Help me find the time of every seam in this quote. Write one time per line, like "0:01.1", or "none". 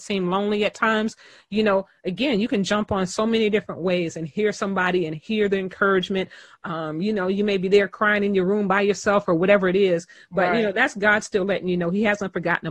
none